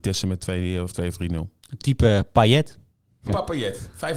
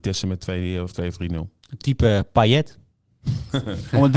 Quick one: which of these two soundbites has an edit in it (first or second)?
first